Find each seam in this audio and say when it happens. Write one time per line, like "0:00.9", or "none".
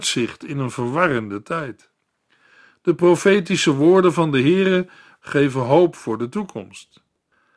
0:05.2